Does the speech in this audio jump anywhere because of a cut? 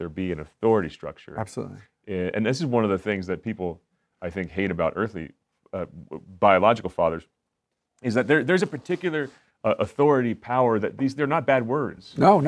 no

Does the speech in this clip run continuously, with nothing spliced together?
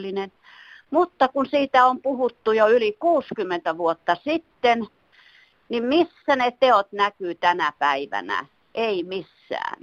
yes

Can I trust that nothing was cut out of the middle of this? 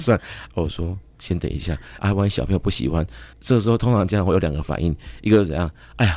no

